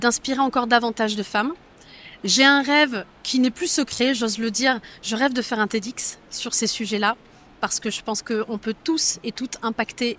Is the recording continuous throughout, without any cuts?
yes; 0 cuts

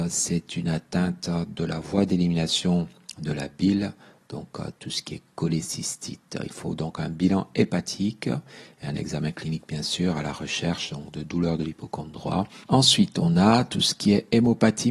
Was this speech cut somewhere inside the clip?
yes; 1 cut; at 12.6 s

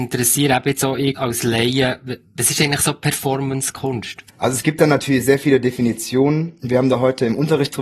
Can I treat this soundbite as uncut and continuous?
no; 2 cuts; at 1.1 s, 4.3 s

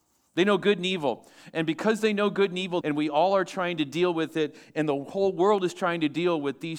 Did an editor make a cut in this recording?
yes; 1 cut; at 2.8 s

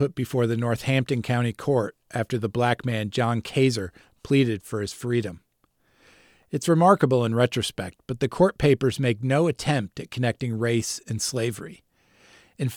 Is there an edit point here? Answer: no; 0 cuts

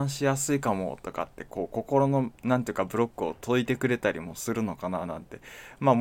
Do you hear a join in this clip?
no; 0 cuts

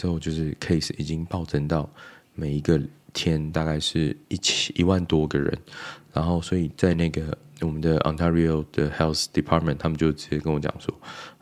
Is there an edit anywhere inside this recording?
no; 0 cuts

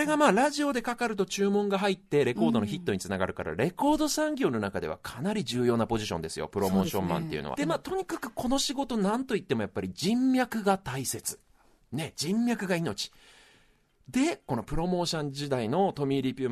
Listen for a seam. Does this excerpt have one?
yes; 1 cut; at 7.6 s

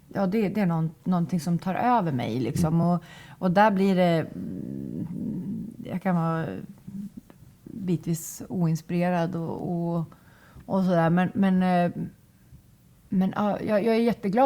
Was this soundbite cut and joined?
no; 0 cuts

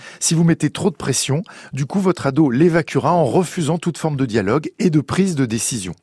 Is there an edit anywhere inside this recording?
no; 0 cuts

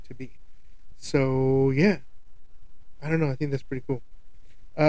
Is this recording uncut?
yes; 0 cuts

